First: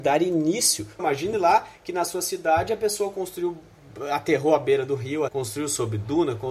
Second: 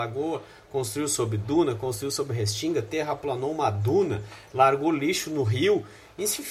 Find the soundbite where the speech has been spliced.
first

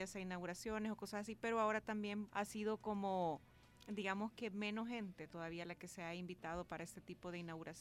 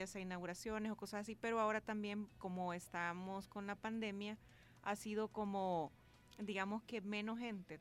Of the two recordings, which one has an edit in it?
first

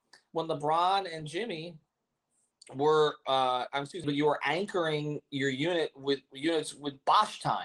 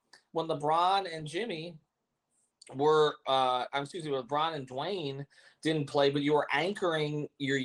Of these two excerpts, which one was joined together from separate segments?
first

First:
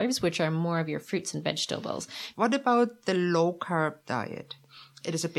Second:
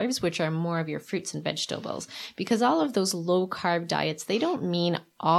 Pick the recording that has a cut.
first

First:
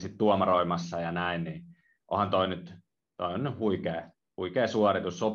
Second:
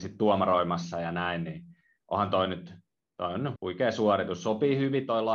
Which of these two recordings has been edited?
second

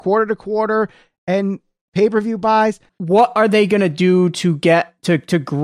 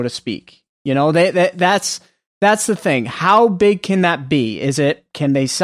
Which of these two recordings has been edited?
first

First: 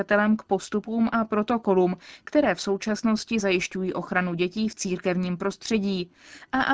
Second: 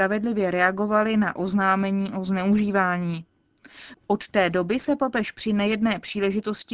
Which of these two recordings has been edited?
second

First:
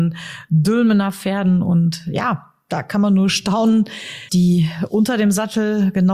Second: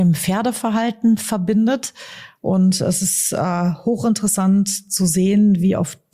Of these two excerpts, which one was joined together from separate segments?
first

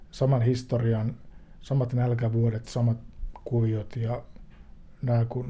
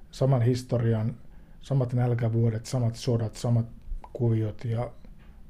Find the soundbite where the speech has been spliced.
first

